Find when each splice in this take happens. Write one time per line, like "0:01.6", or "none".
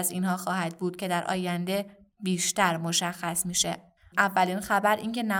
0:04.1